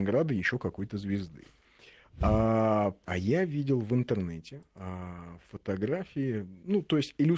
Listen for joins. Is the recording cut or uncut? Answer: cut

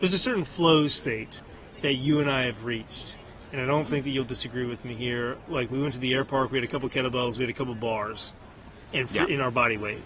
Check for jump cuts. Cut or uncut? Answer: uncut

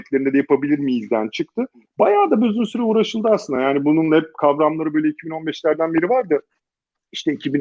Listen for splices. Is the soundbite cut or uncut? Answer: uncut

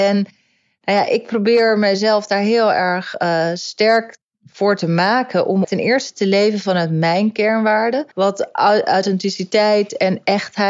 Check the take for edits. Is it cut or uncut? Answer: cut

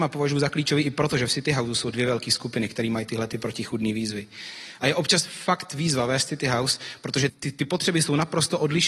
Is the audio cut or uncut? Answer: cut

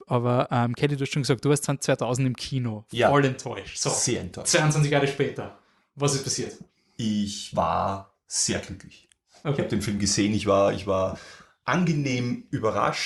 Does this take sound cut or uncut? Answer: uncut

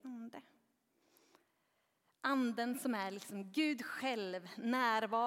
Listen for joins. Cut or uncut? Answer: uncut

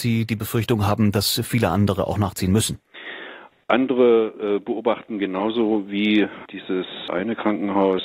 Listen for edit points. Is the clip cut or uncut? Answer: uncut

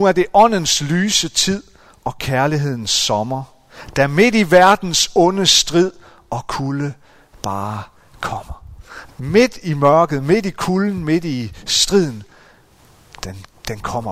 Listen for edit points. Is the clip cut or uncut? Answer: cut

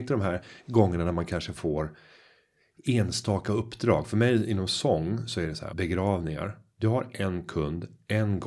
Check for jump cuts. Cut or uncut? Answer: cut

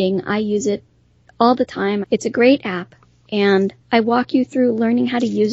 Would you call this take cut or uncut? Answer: cut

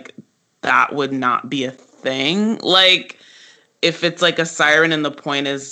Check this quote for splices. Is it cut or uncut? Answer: uncut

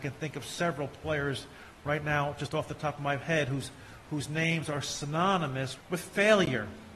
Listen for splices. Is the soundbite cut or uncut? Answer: cut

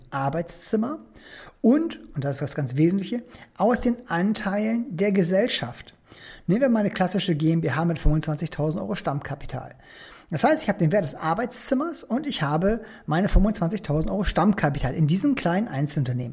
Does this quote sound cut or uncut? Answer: uncut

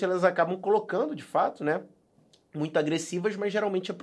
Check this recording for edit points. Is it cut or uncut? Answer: uncut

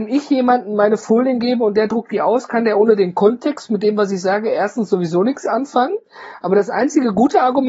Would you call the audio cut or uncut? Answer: uncut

